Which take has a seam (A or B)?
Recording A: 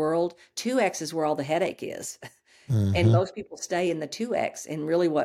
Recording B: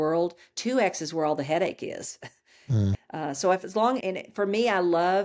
B